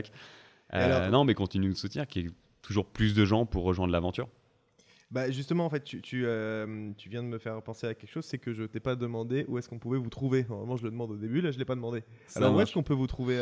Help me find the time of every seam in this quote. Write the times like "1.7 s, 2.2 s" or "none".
none